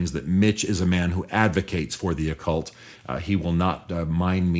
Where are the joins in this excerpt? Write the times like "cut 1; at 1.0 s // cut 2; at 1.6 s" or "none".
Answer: none